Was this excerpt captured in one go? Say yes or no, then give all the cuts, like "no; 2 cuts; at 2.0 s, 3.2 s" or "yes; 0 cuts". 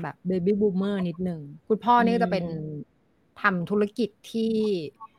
no; 1 cut; at 1.6 s